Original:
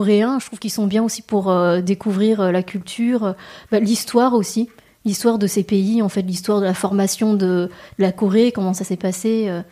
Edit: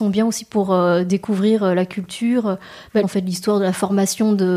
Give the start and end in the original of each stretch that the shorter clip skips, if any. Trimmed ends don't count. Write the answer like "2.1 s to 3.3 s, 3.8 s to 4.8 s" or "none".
3.8 s to 6.0 s